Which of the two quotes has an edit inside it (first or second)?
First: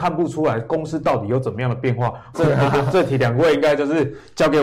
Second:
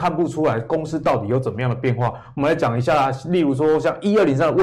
first